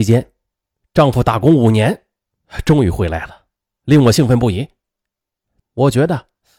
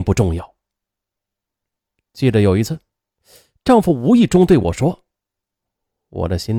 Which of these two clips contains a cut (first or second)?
first